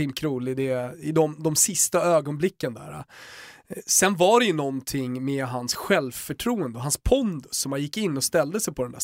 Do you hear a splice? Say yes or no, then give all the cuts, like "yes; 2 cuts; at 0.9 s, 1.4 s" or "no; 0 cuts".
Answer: no; 0 cuts